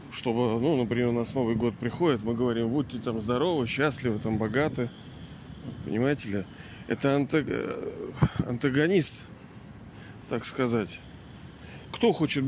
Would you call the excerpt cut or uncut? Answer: uncut